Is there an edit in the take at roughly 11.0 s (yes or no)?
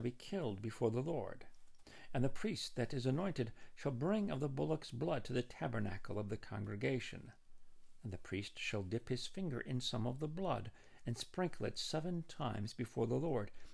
no